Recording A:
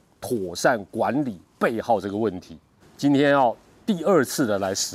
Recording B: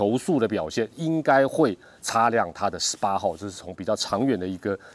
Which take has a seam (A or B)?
A